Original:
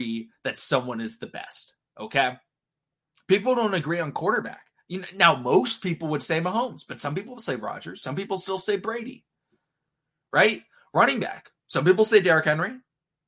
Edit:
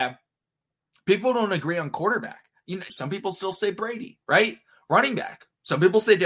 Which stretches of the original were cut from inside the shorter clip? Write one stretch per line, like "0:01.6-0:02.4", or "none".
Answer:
0:05.1-0:08.0
0:09.3-0:10.3